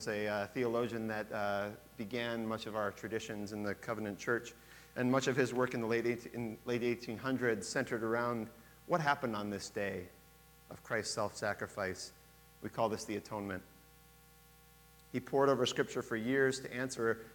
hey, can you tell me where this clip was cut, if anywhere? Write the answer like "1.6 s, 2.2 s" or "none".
none